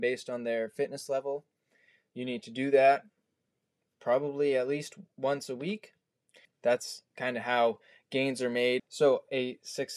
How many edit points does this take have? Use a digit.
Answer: 2